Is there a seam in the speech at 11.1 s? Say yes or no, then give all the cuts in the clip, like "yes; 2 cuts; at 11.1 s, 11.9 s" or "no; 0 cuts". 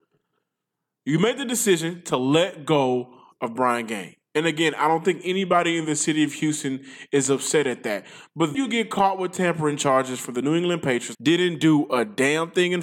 yes; 2 cuts; at 8.5 s, 11.1 s